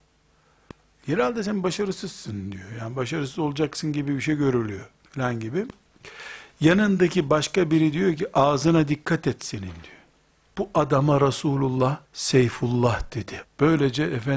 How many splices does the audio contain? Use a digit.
3